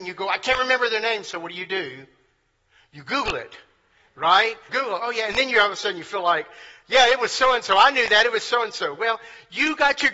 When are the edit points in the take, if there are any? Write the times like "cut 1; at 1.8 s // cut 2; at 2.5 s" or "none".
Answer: cut 1; at 4.7 s